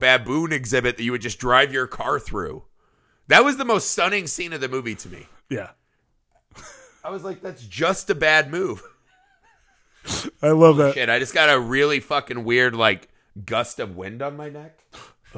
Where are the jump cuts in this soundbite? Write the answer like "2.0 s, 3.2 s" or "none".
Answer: none